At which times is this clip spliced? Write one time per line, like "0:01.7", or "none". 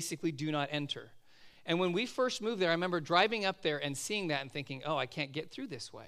none